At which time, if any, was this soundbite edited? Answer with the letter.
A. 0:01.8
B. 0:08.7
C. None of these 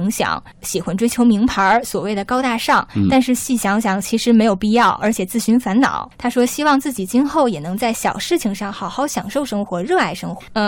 C